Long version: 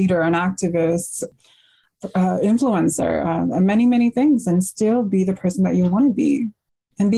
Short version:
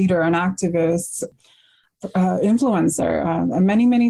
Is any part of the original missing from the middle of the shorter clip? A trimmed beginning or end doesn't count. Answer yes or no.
no